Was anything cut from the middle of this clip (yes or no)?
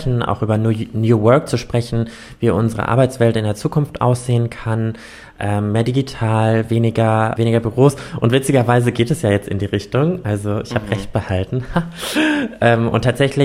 yes